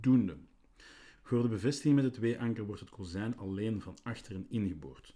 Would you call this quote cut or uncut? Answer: uncut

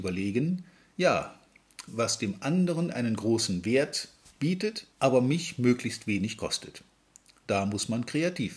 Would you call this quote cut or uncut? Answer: cut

